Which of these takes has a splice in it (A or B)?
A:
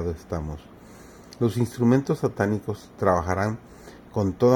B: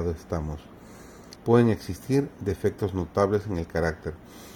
B